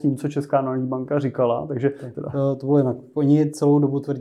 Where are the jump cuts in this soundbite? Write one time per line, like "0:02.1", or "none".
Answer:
0:02.1